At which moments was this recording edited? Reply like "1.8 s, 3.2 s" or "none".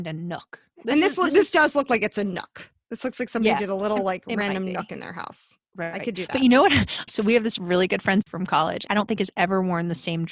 7.1 s, 8.9 s